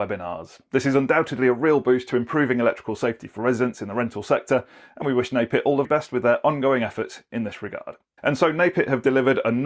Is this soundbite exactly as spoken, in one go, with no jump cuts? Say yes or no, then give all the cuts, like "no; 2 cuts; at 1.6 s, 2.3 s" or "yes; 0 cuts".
no; 2 cuts; at 5.8 s, 8.2 s